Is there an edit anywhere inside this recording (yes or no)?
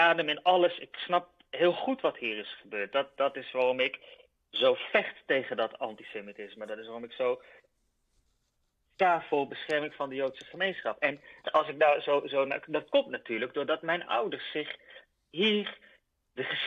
yes